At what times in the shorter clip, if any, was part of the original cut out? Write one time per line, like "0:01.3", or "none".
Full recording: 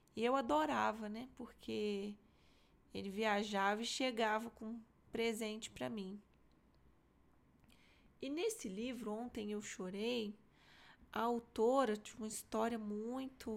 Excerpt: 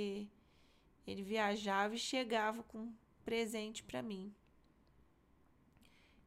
none